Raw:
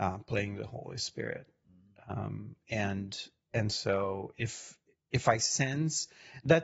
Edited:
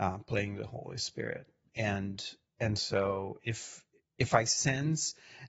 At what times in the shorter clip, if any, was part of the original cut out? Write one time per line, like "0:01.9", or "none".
0:01.7